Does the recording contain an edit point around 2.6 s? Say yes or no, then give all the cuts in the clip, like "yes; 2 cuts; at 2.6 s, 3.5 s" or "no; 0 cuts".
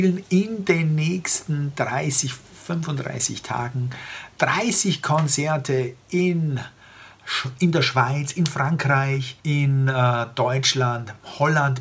no; 1 cut; at 9.4 s